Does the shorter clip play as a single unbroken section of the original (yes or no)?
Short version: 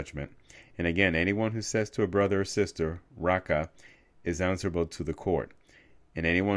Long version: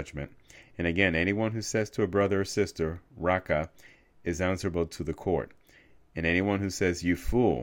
yes